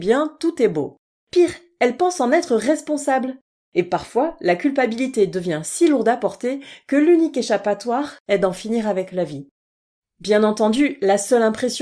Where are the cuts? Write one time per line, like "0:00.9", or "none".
0:01.2